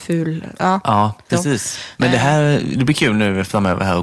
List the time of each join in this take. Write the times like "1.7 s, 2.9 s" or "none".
1.3 s